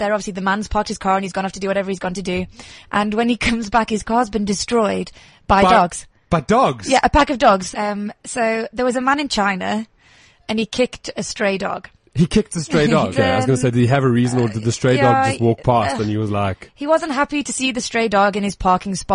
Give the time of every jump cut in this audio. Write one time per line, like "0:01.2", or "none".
0:07.7
0:13.1

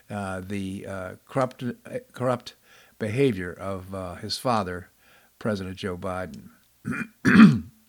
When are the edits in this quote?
none

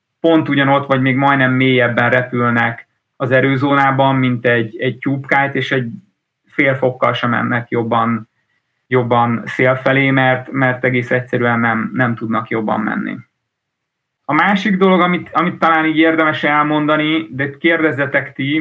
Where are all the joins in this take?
none

